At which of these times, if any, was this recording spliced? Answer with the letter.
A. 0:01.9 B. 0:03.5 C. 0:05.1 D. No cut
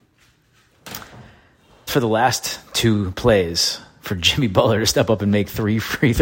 A